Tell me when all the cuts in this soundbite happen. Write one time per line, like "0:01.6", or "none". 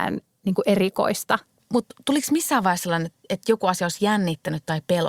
0:01.6